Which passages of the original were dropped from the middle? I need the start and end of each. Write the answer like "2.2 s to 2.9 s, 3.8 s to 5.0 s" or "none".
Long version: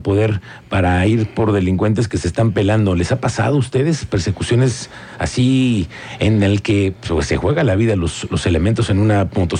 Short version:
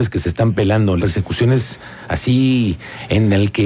3.0 s to 4.1 s